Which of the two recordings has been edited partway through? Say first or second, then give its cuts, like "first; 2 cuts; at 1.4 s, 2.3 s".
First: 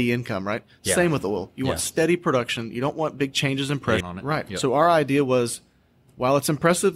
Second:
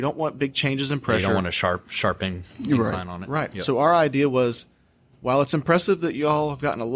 first; 1 cut; at 4.0 s